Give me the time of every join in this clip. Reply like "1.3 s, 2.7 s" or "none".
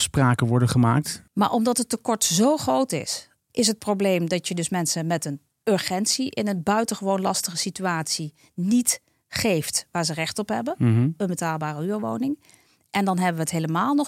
1.3 s, 3.5 s